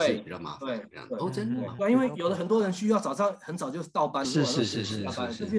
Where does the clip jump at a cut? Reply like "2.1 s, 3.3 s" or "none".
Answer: 1.8 s, 4.2 s